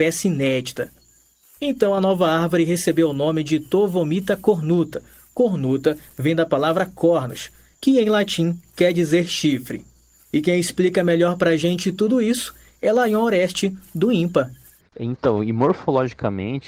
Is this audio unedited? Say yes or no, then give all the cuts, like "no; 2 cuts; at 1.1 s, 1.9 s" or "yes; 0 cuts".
yes; 0 cuts